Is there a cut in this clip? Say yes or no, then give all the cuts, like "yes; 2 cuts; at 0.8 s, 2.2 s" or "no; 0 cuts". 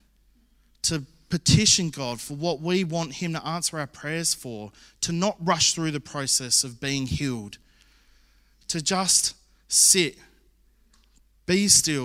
no; 0 cuts